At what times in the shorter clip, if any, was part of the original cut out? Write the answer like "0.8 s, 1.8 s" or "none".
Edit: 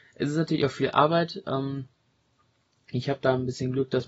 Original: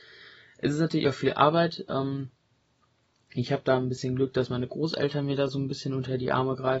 none